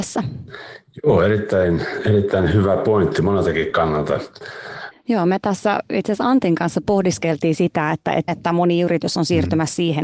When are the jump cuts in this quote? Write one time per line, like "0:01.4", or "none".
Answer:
0:04.9
0:08.3